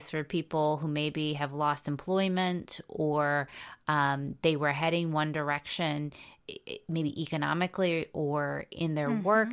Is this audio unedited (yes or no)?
yes